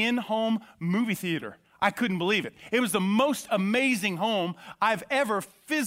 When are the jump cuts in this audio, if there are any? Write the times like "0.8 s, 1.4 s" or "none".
none